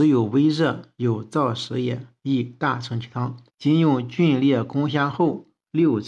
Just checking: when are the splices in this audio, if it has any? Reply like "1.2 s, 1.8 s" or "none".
0.9 s, 3.5 s